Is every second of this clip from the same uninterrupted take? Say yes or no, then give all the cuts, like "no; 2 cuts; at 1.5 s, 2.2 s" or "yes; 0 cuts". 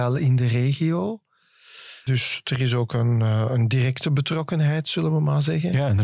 no; 1 cut; at 2.1 s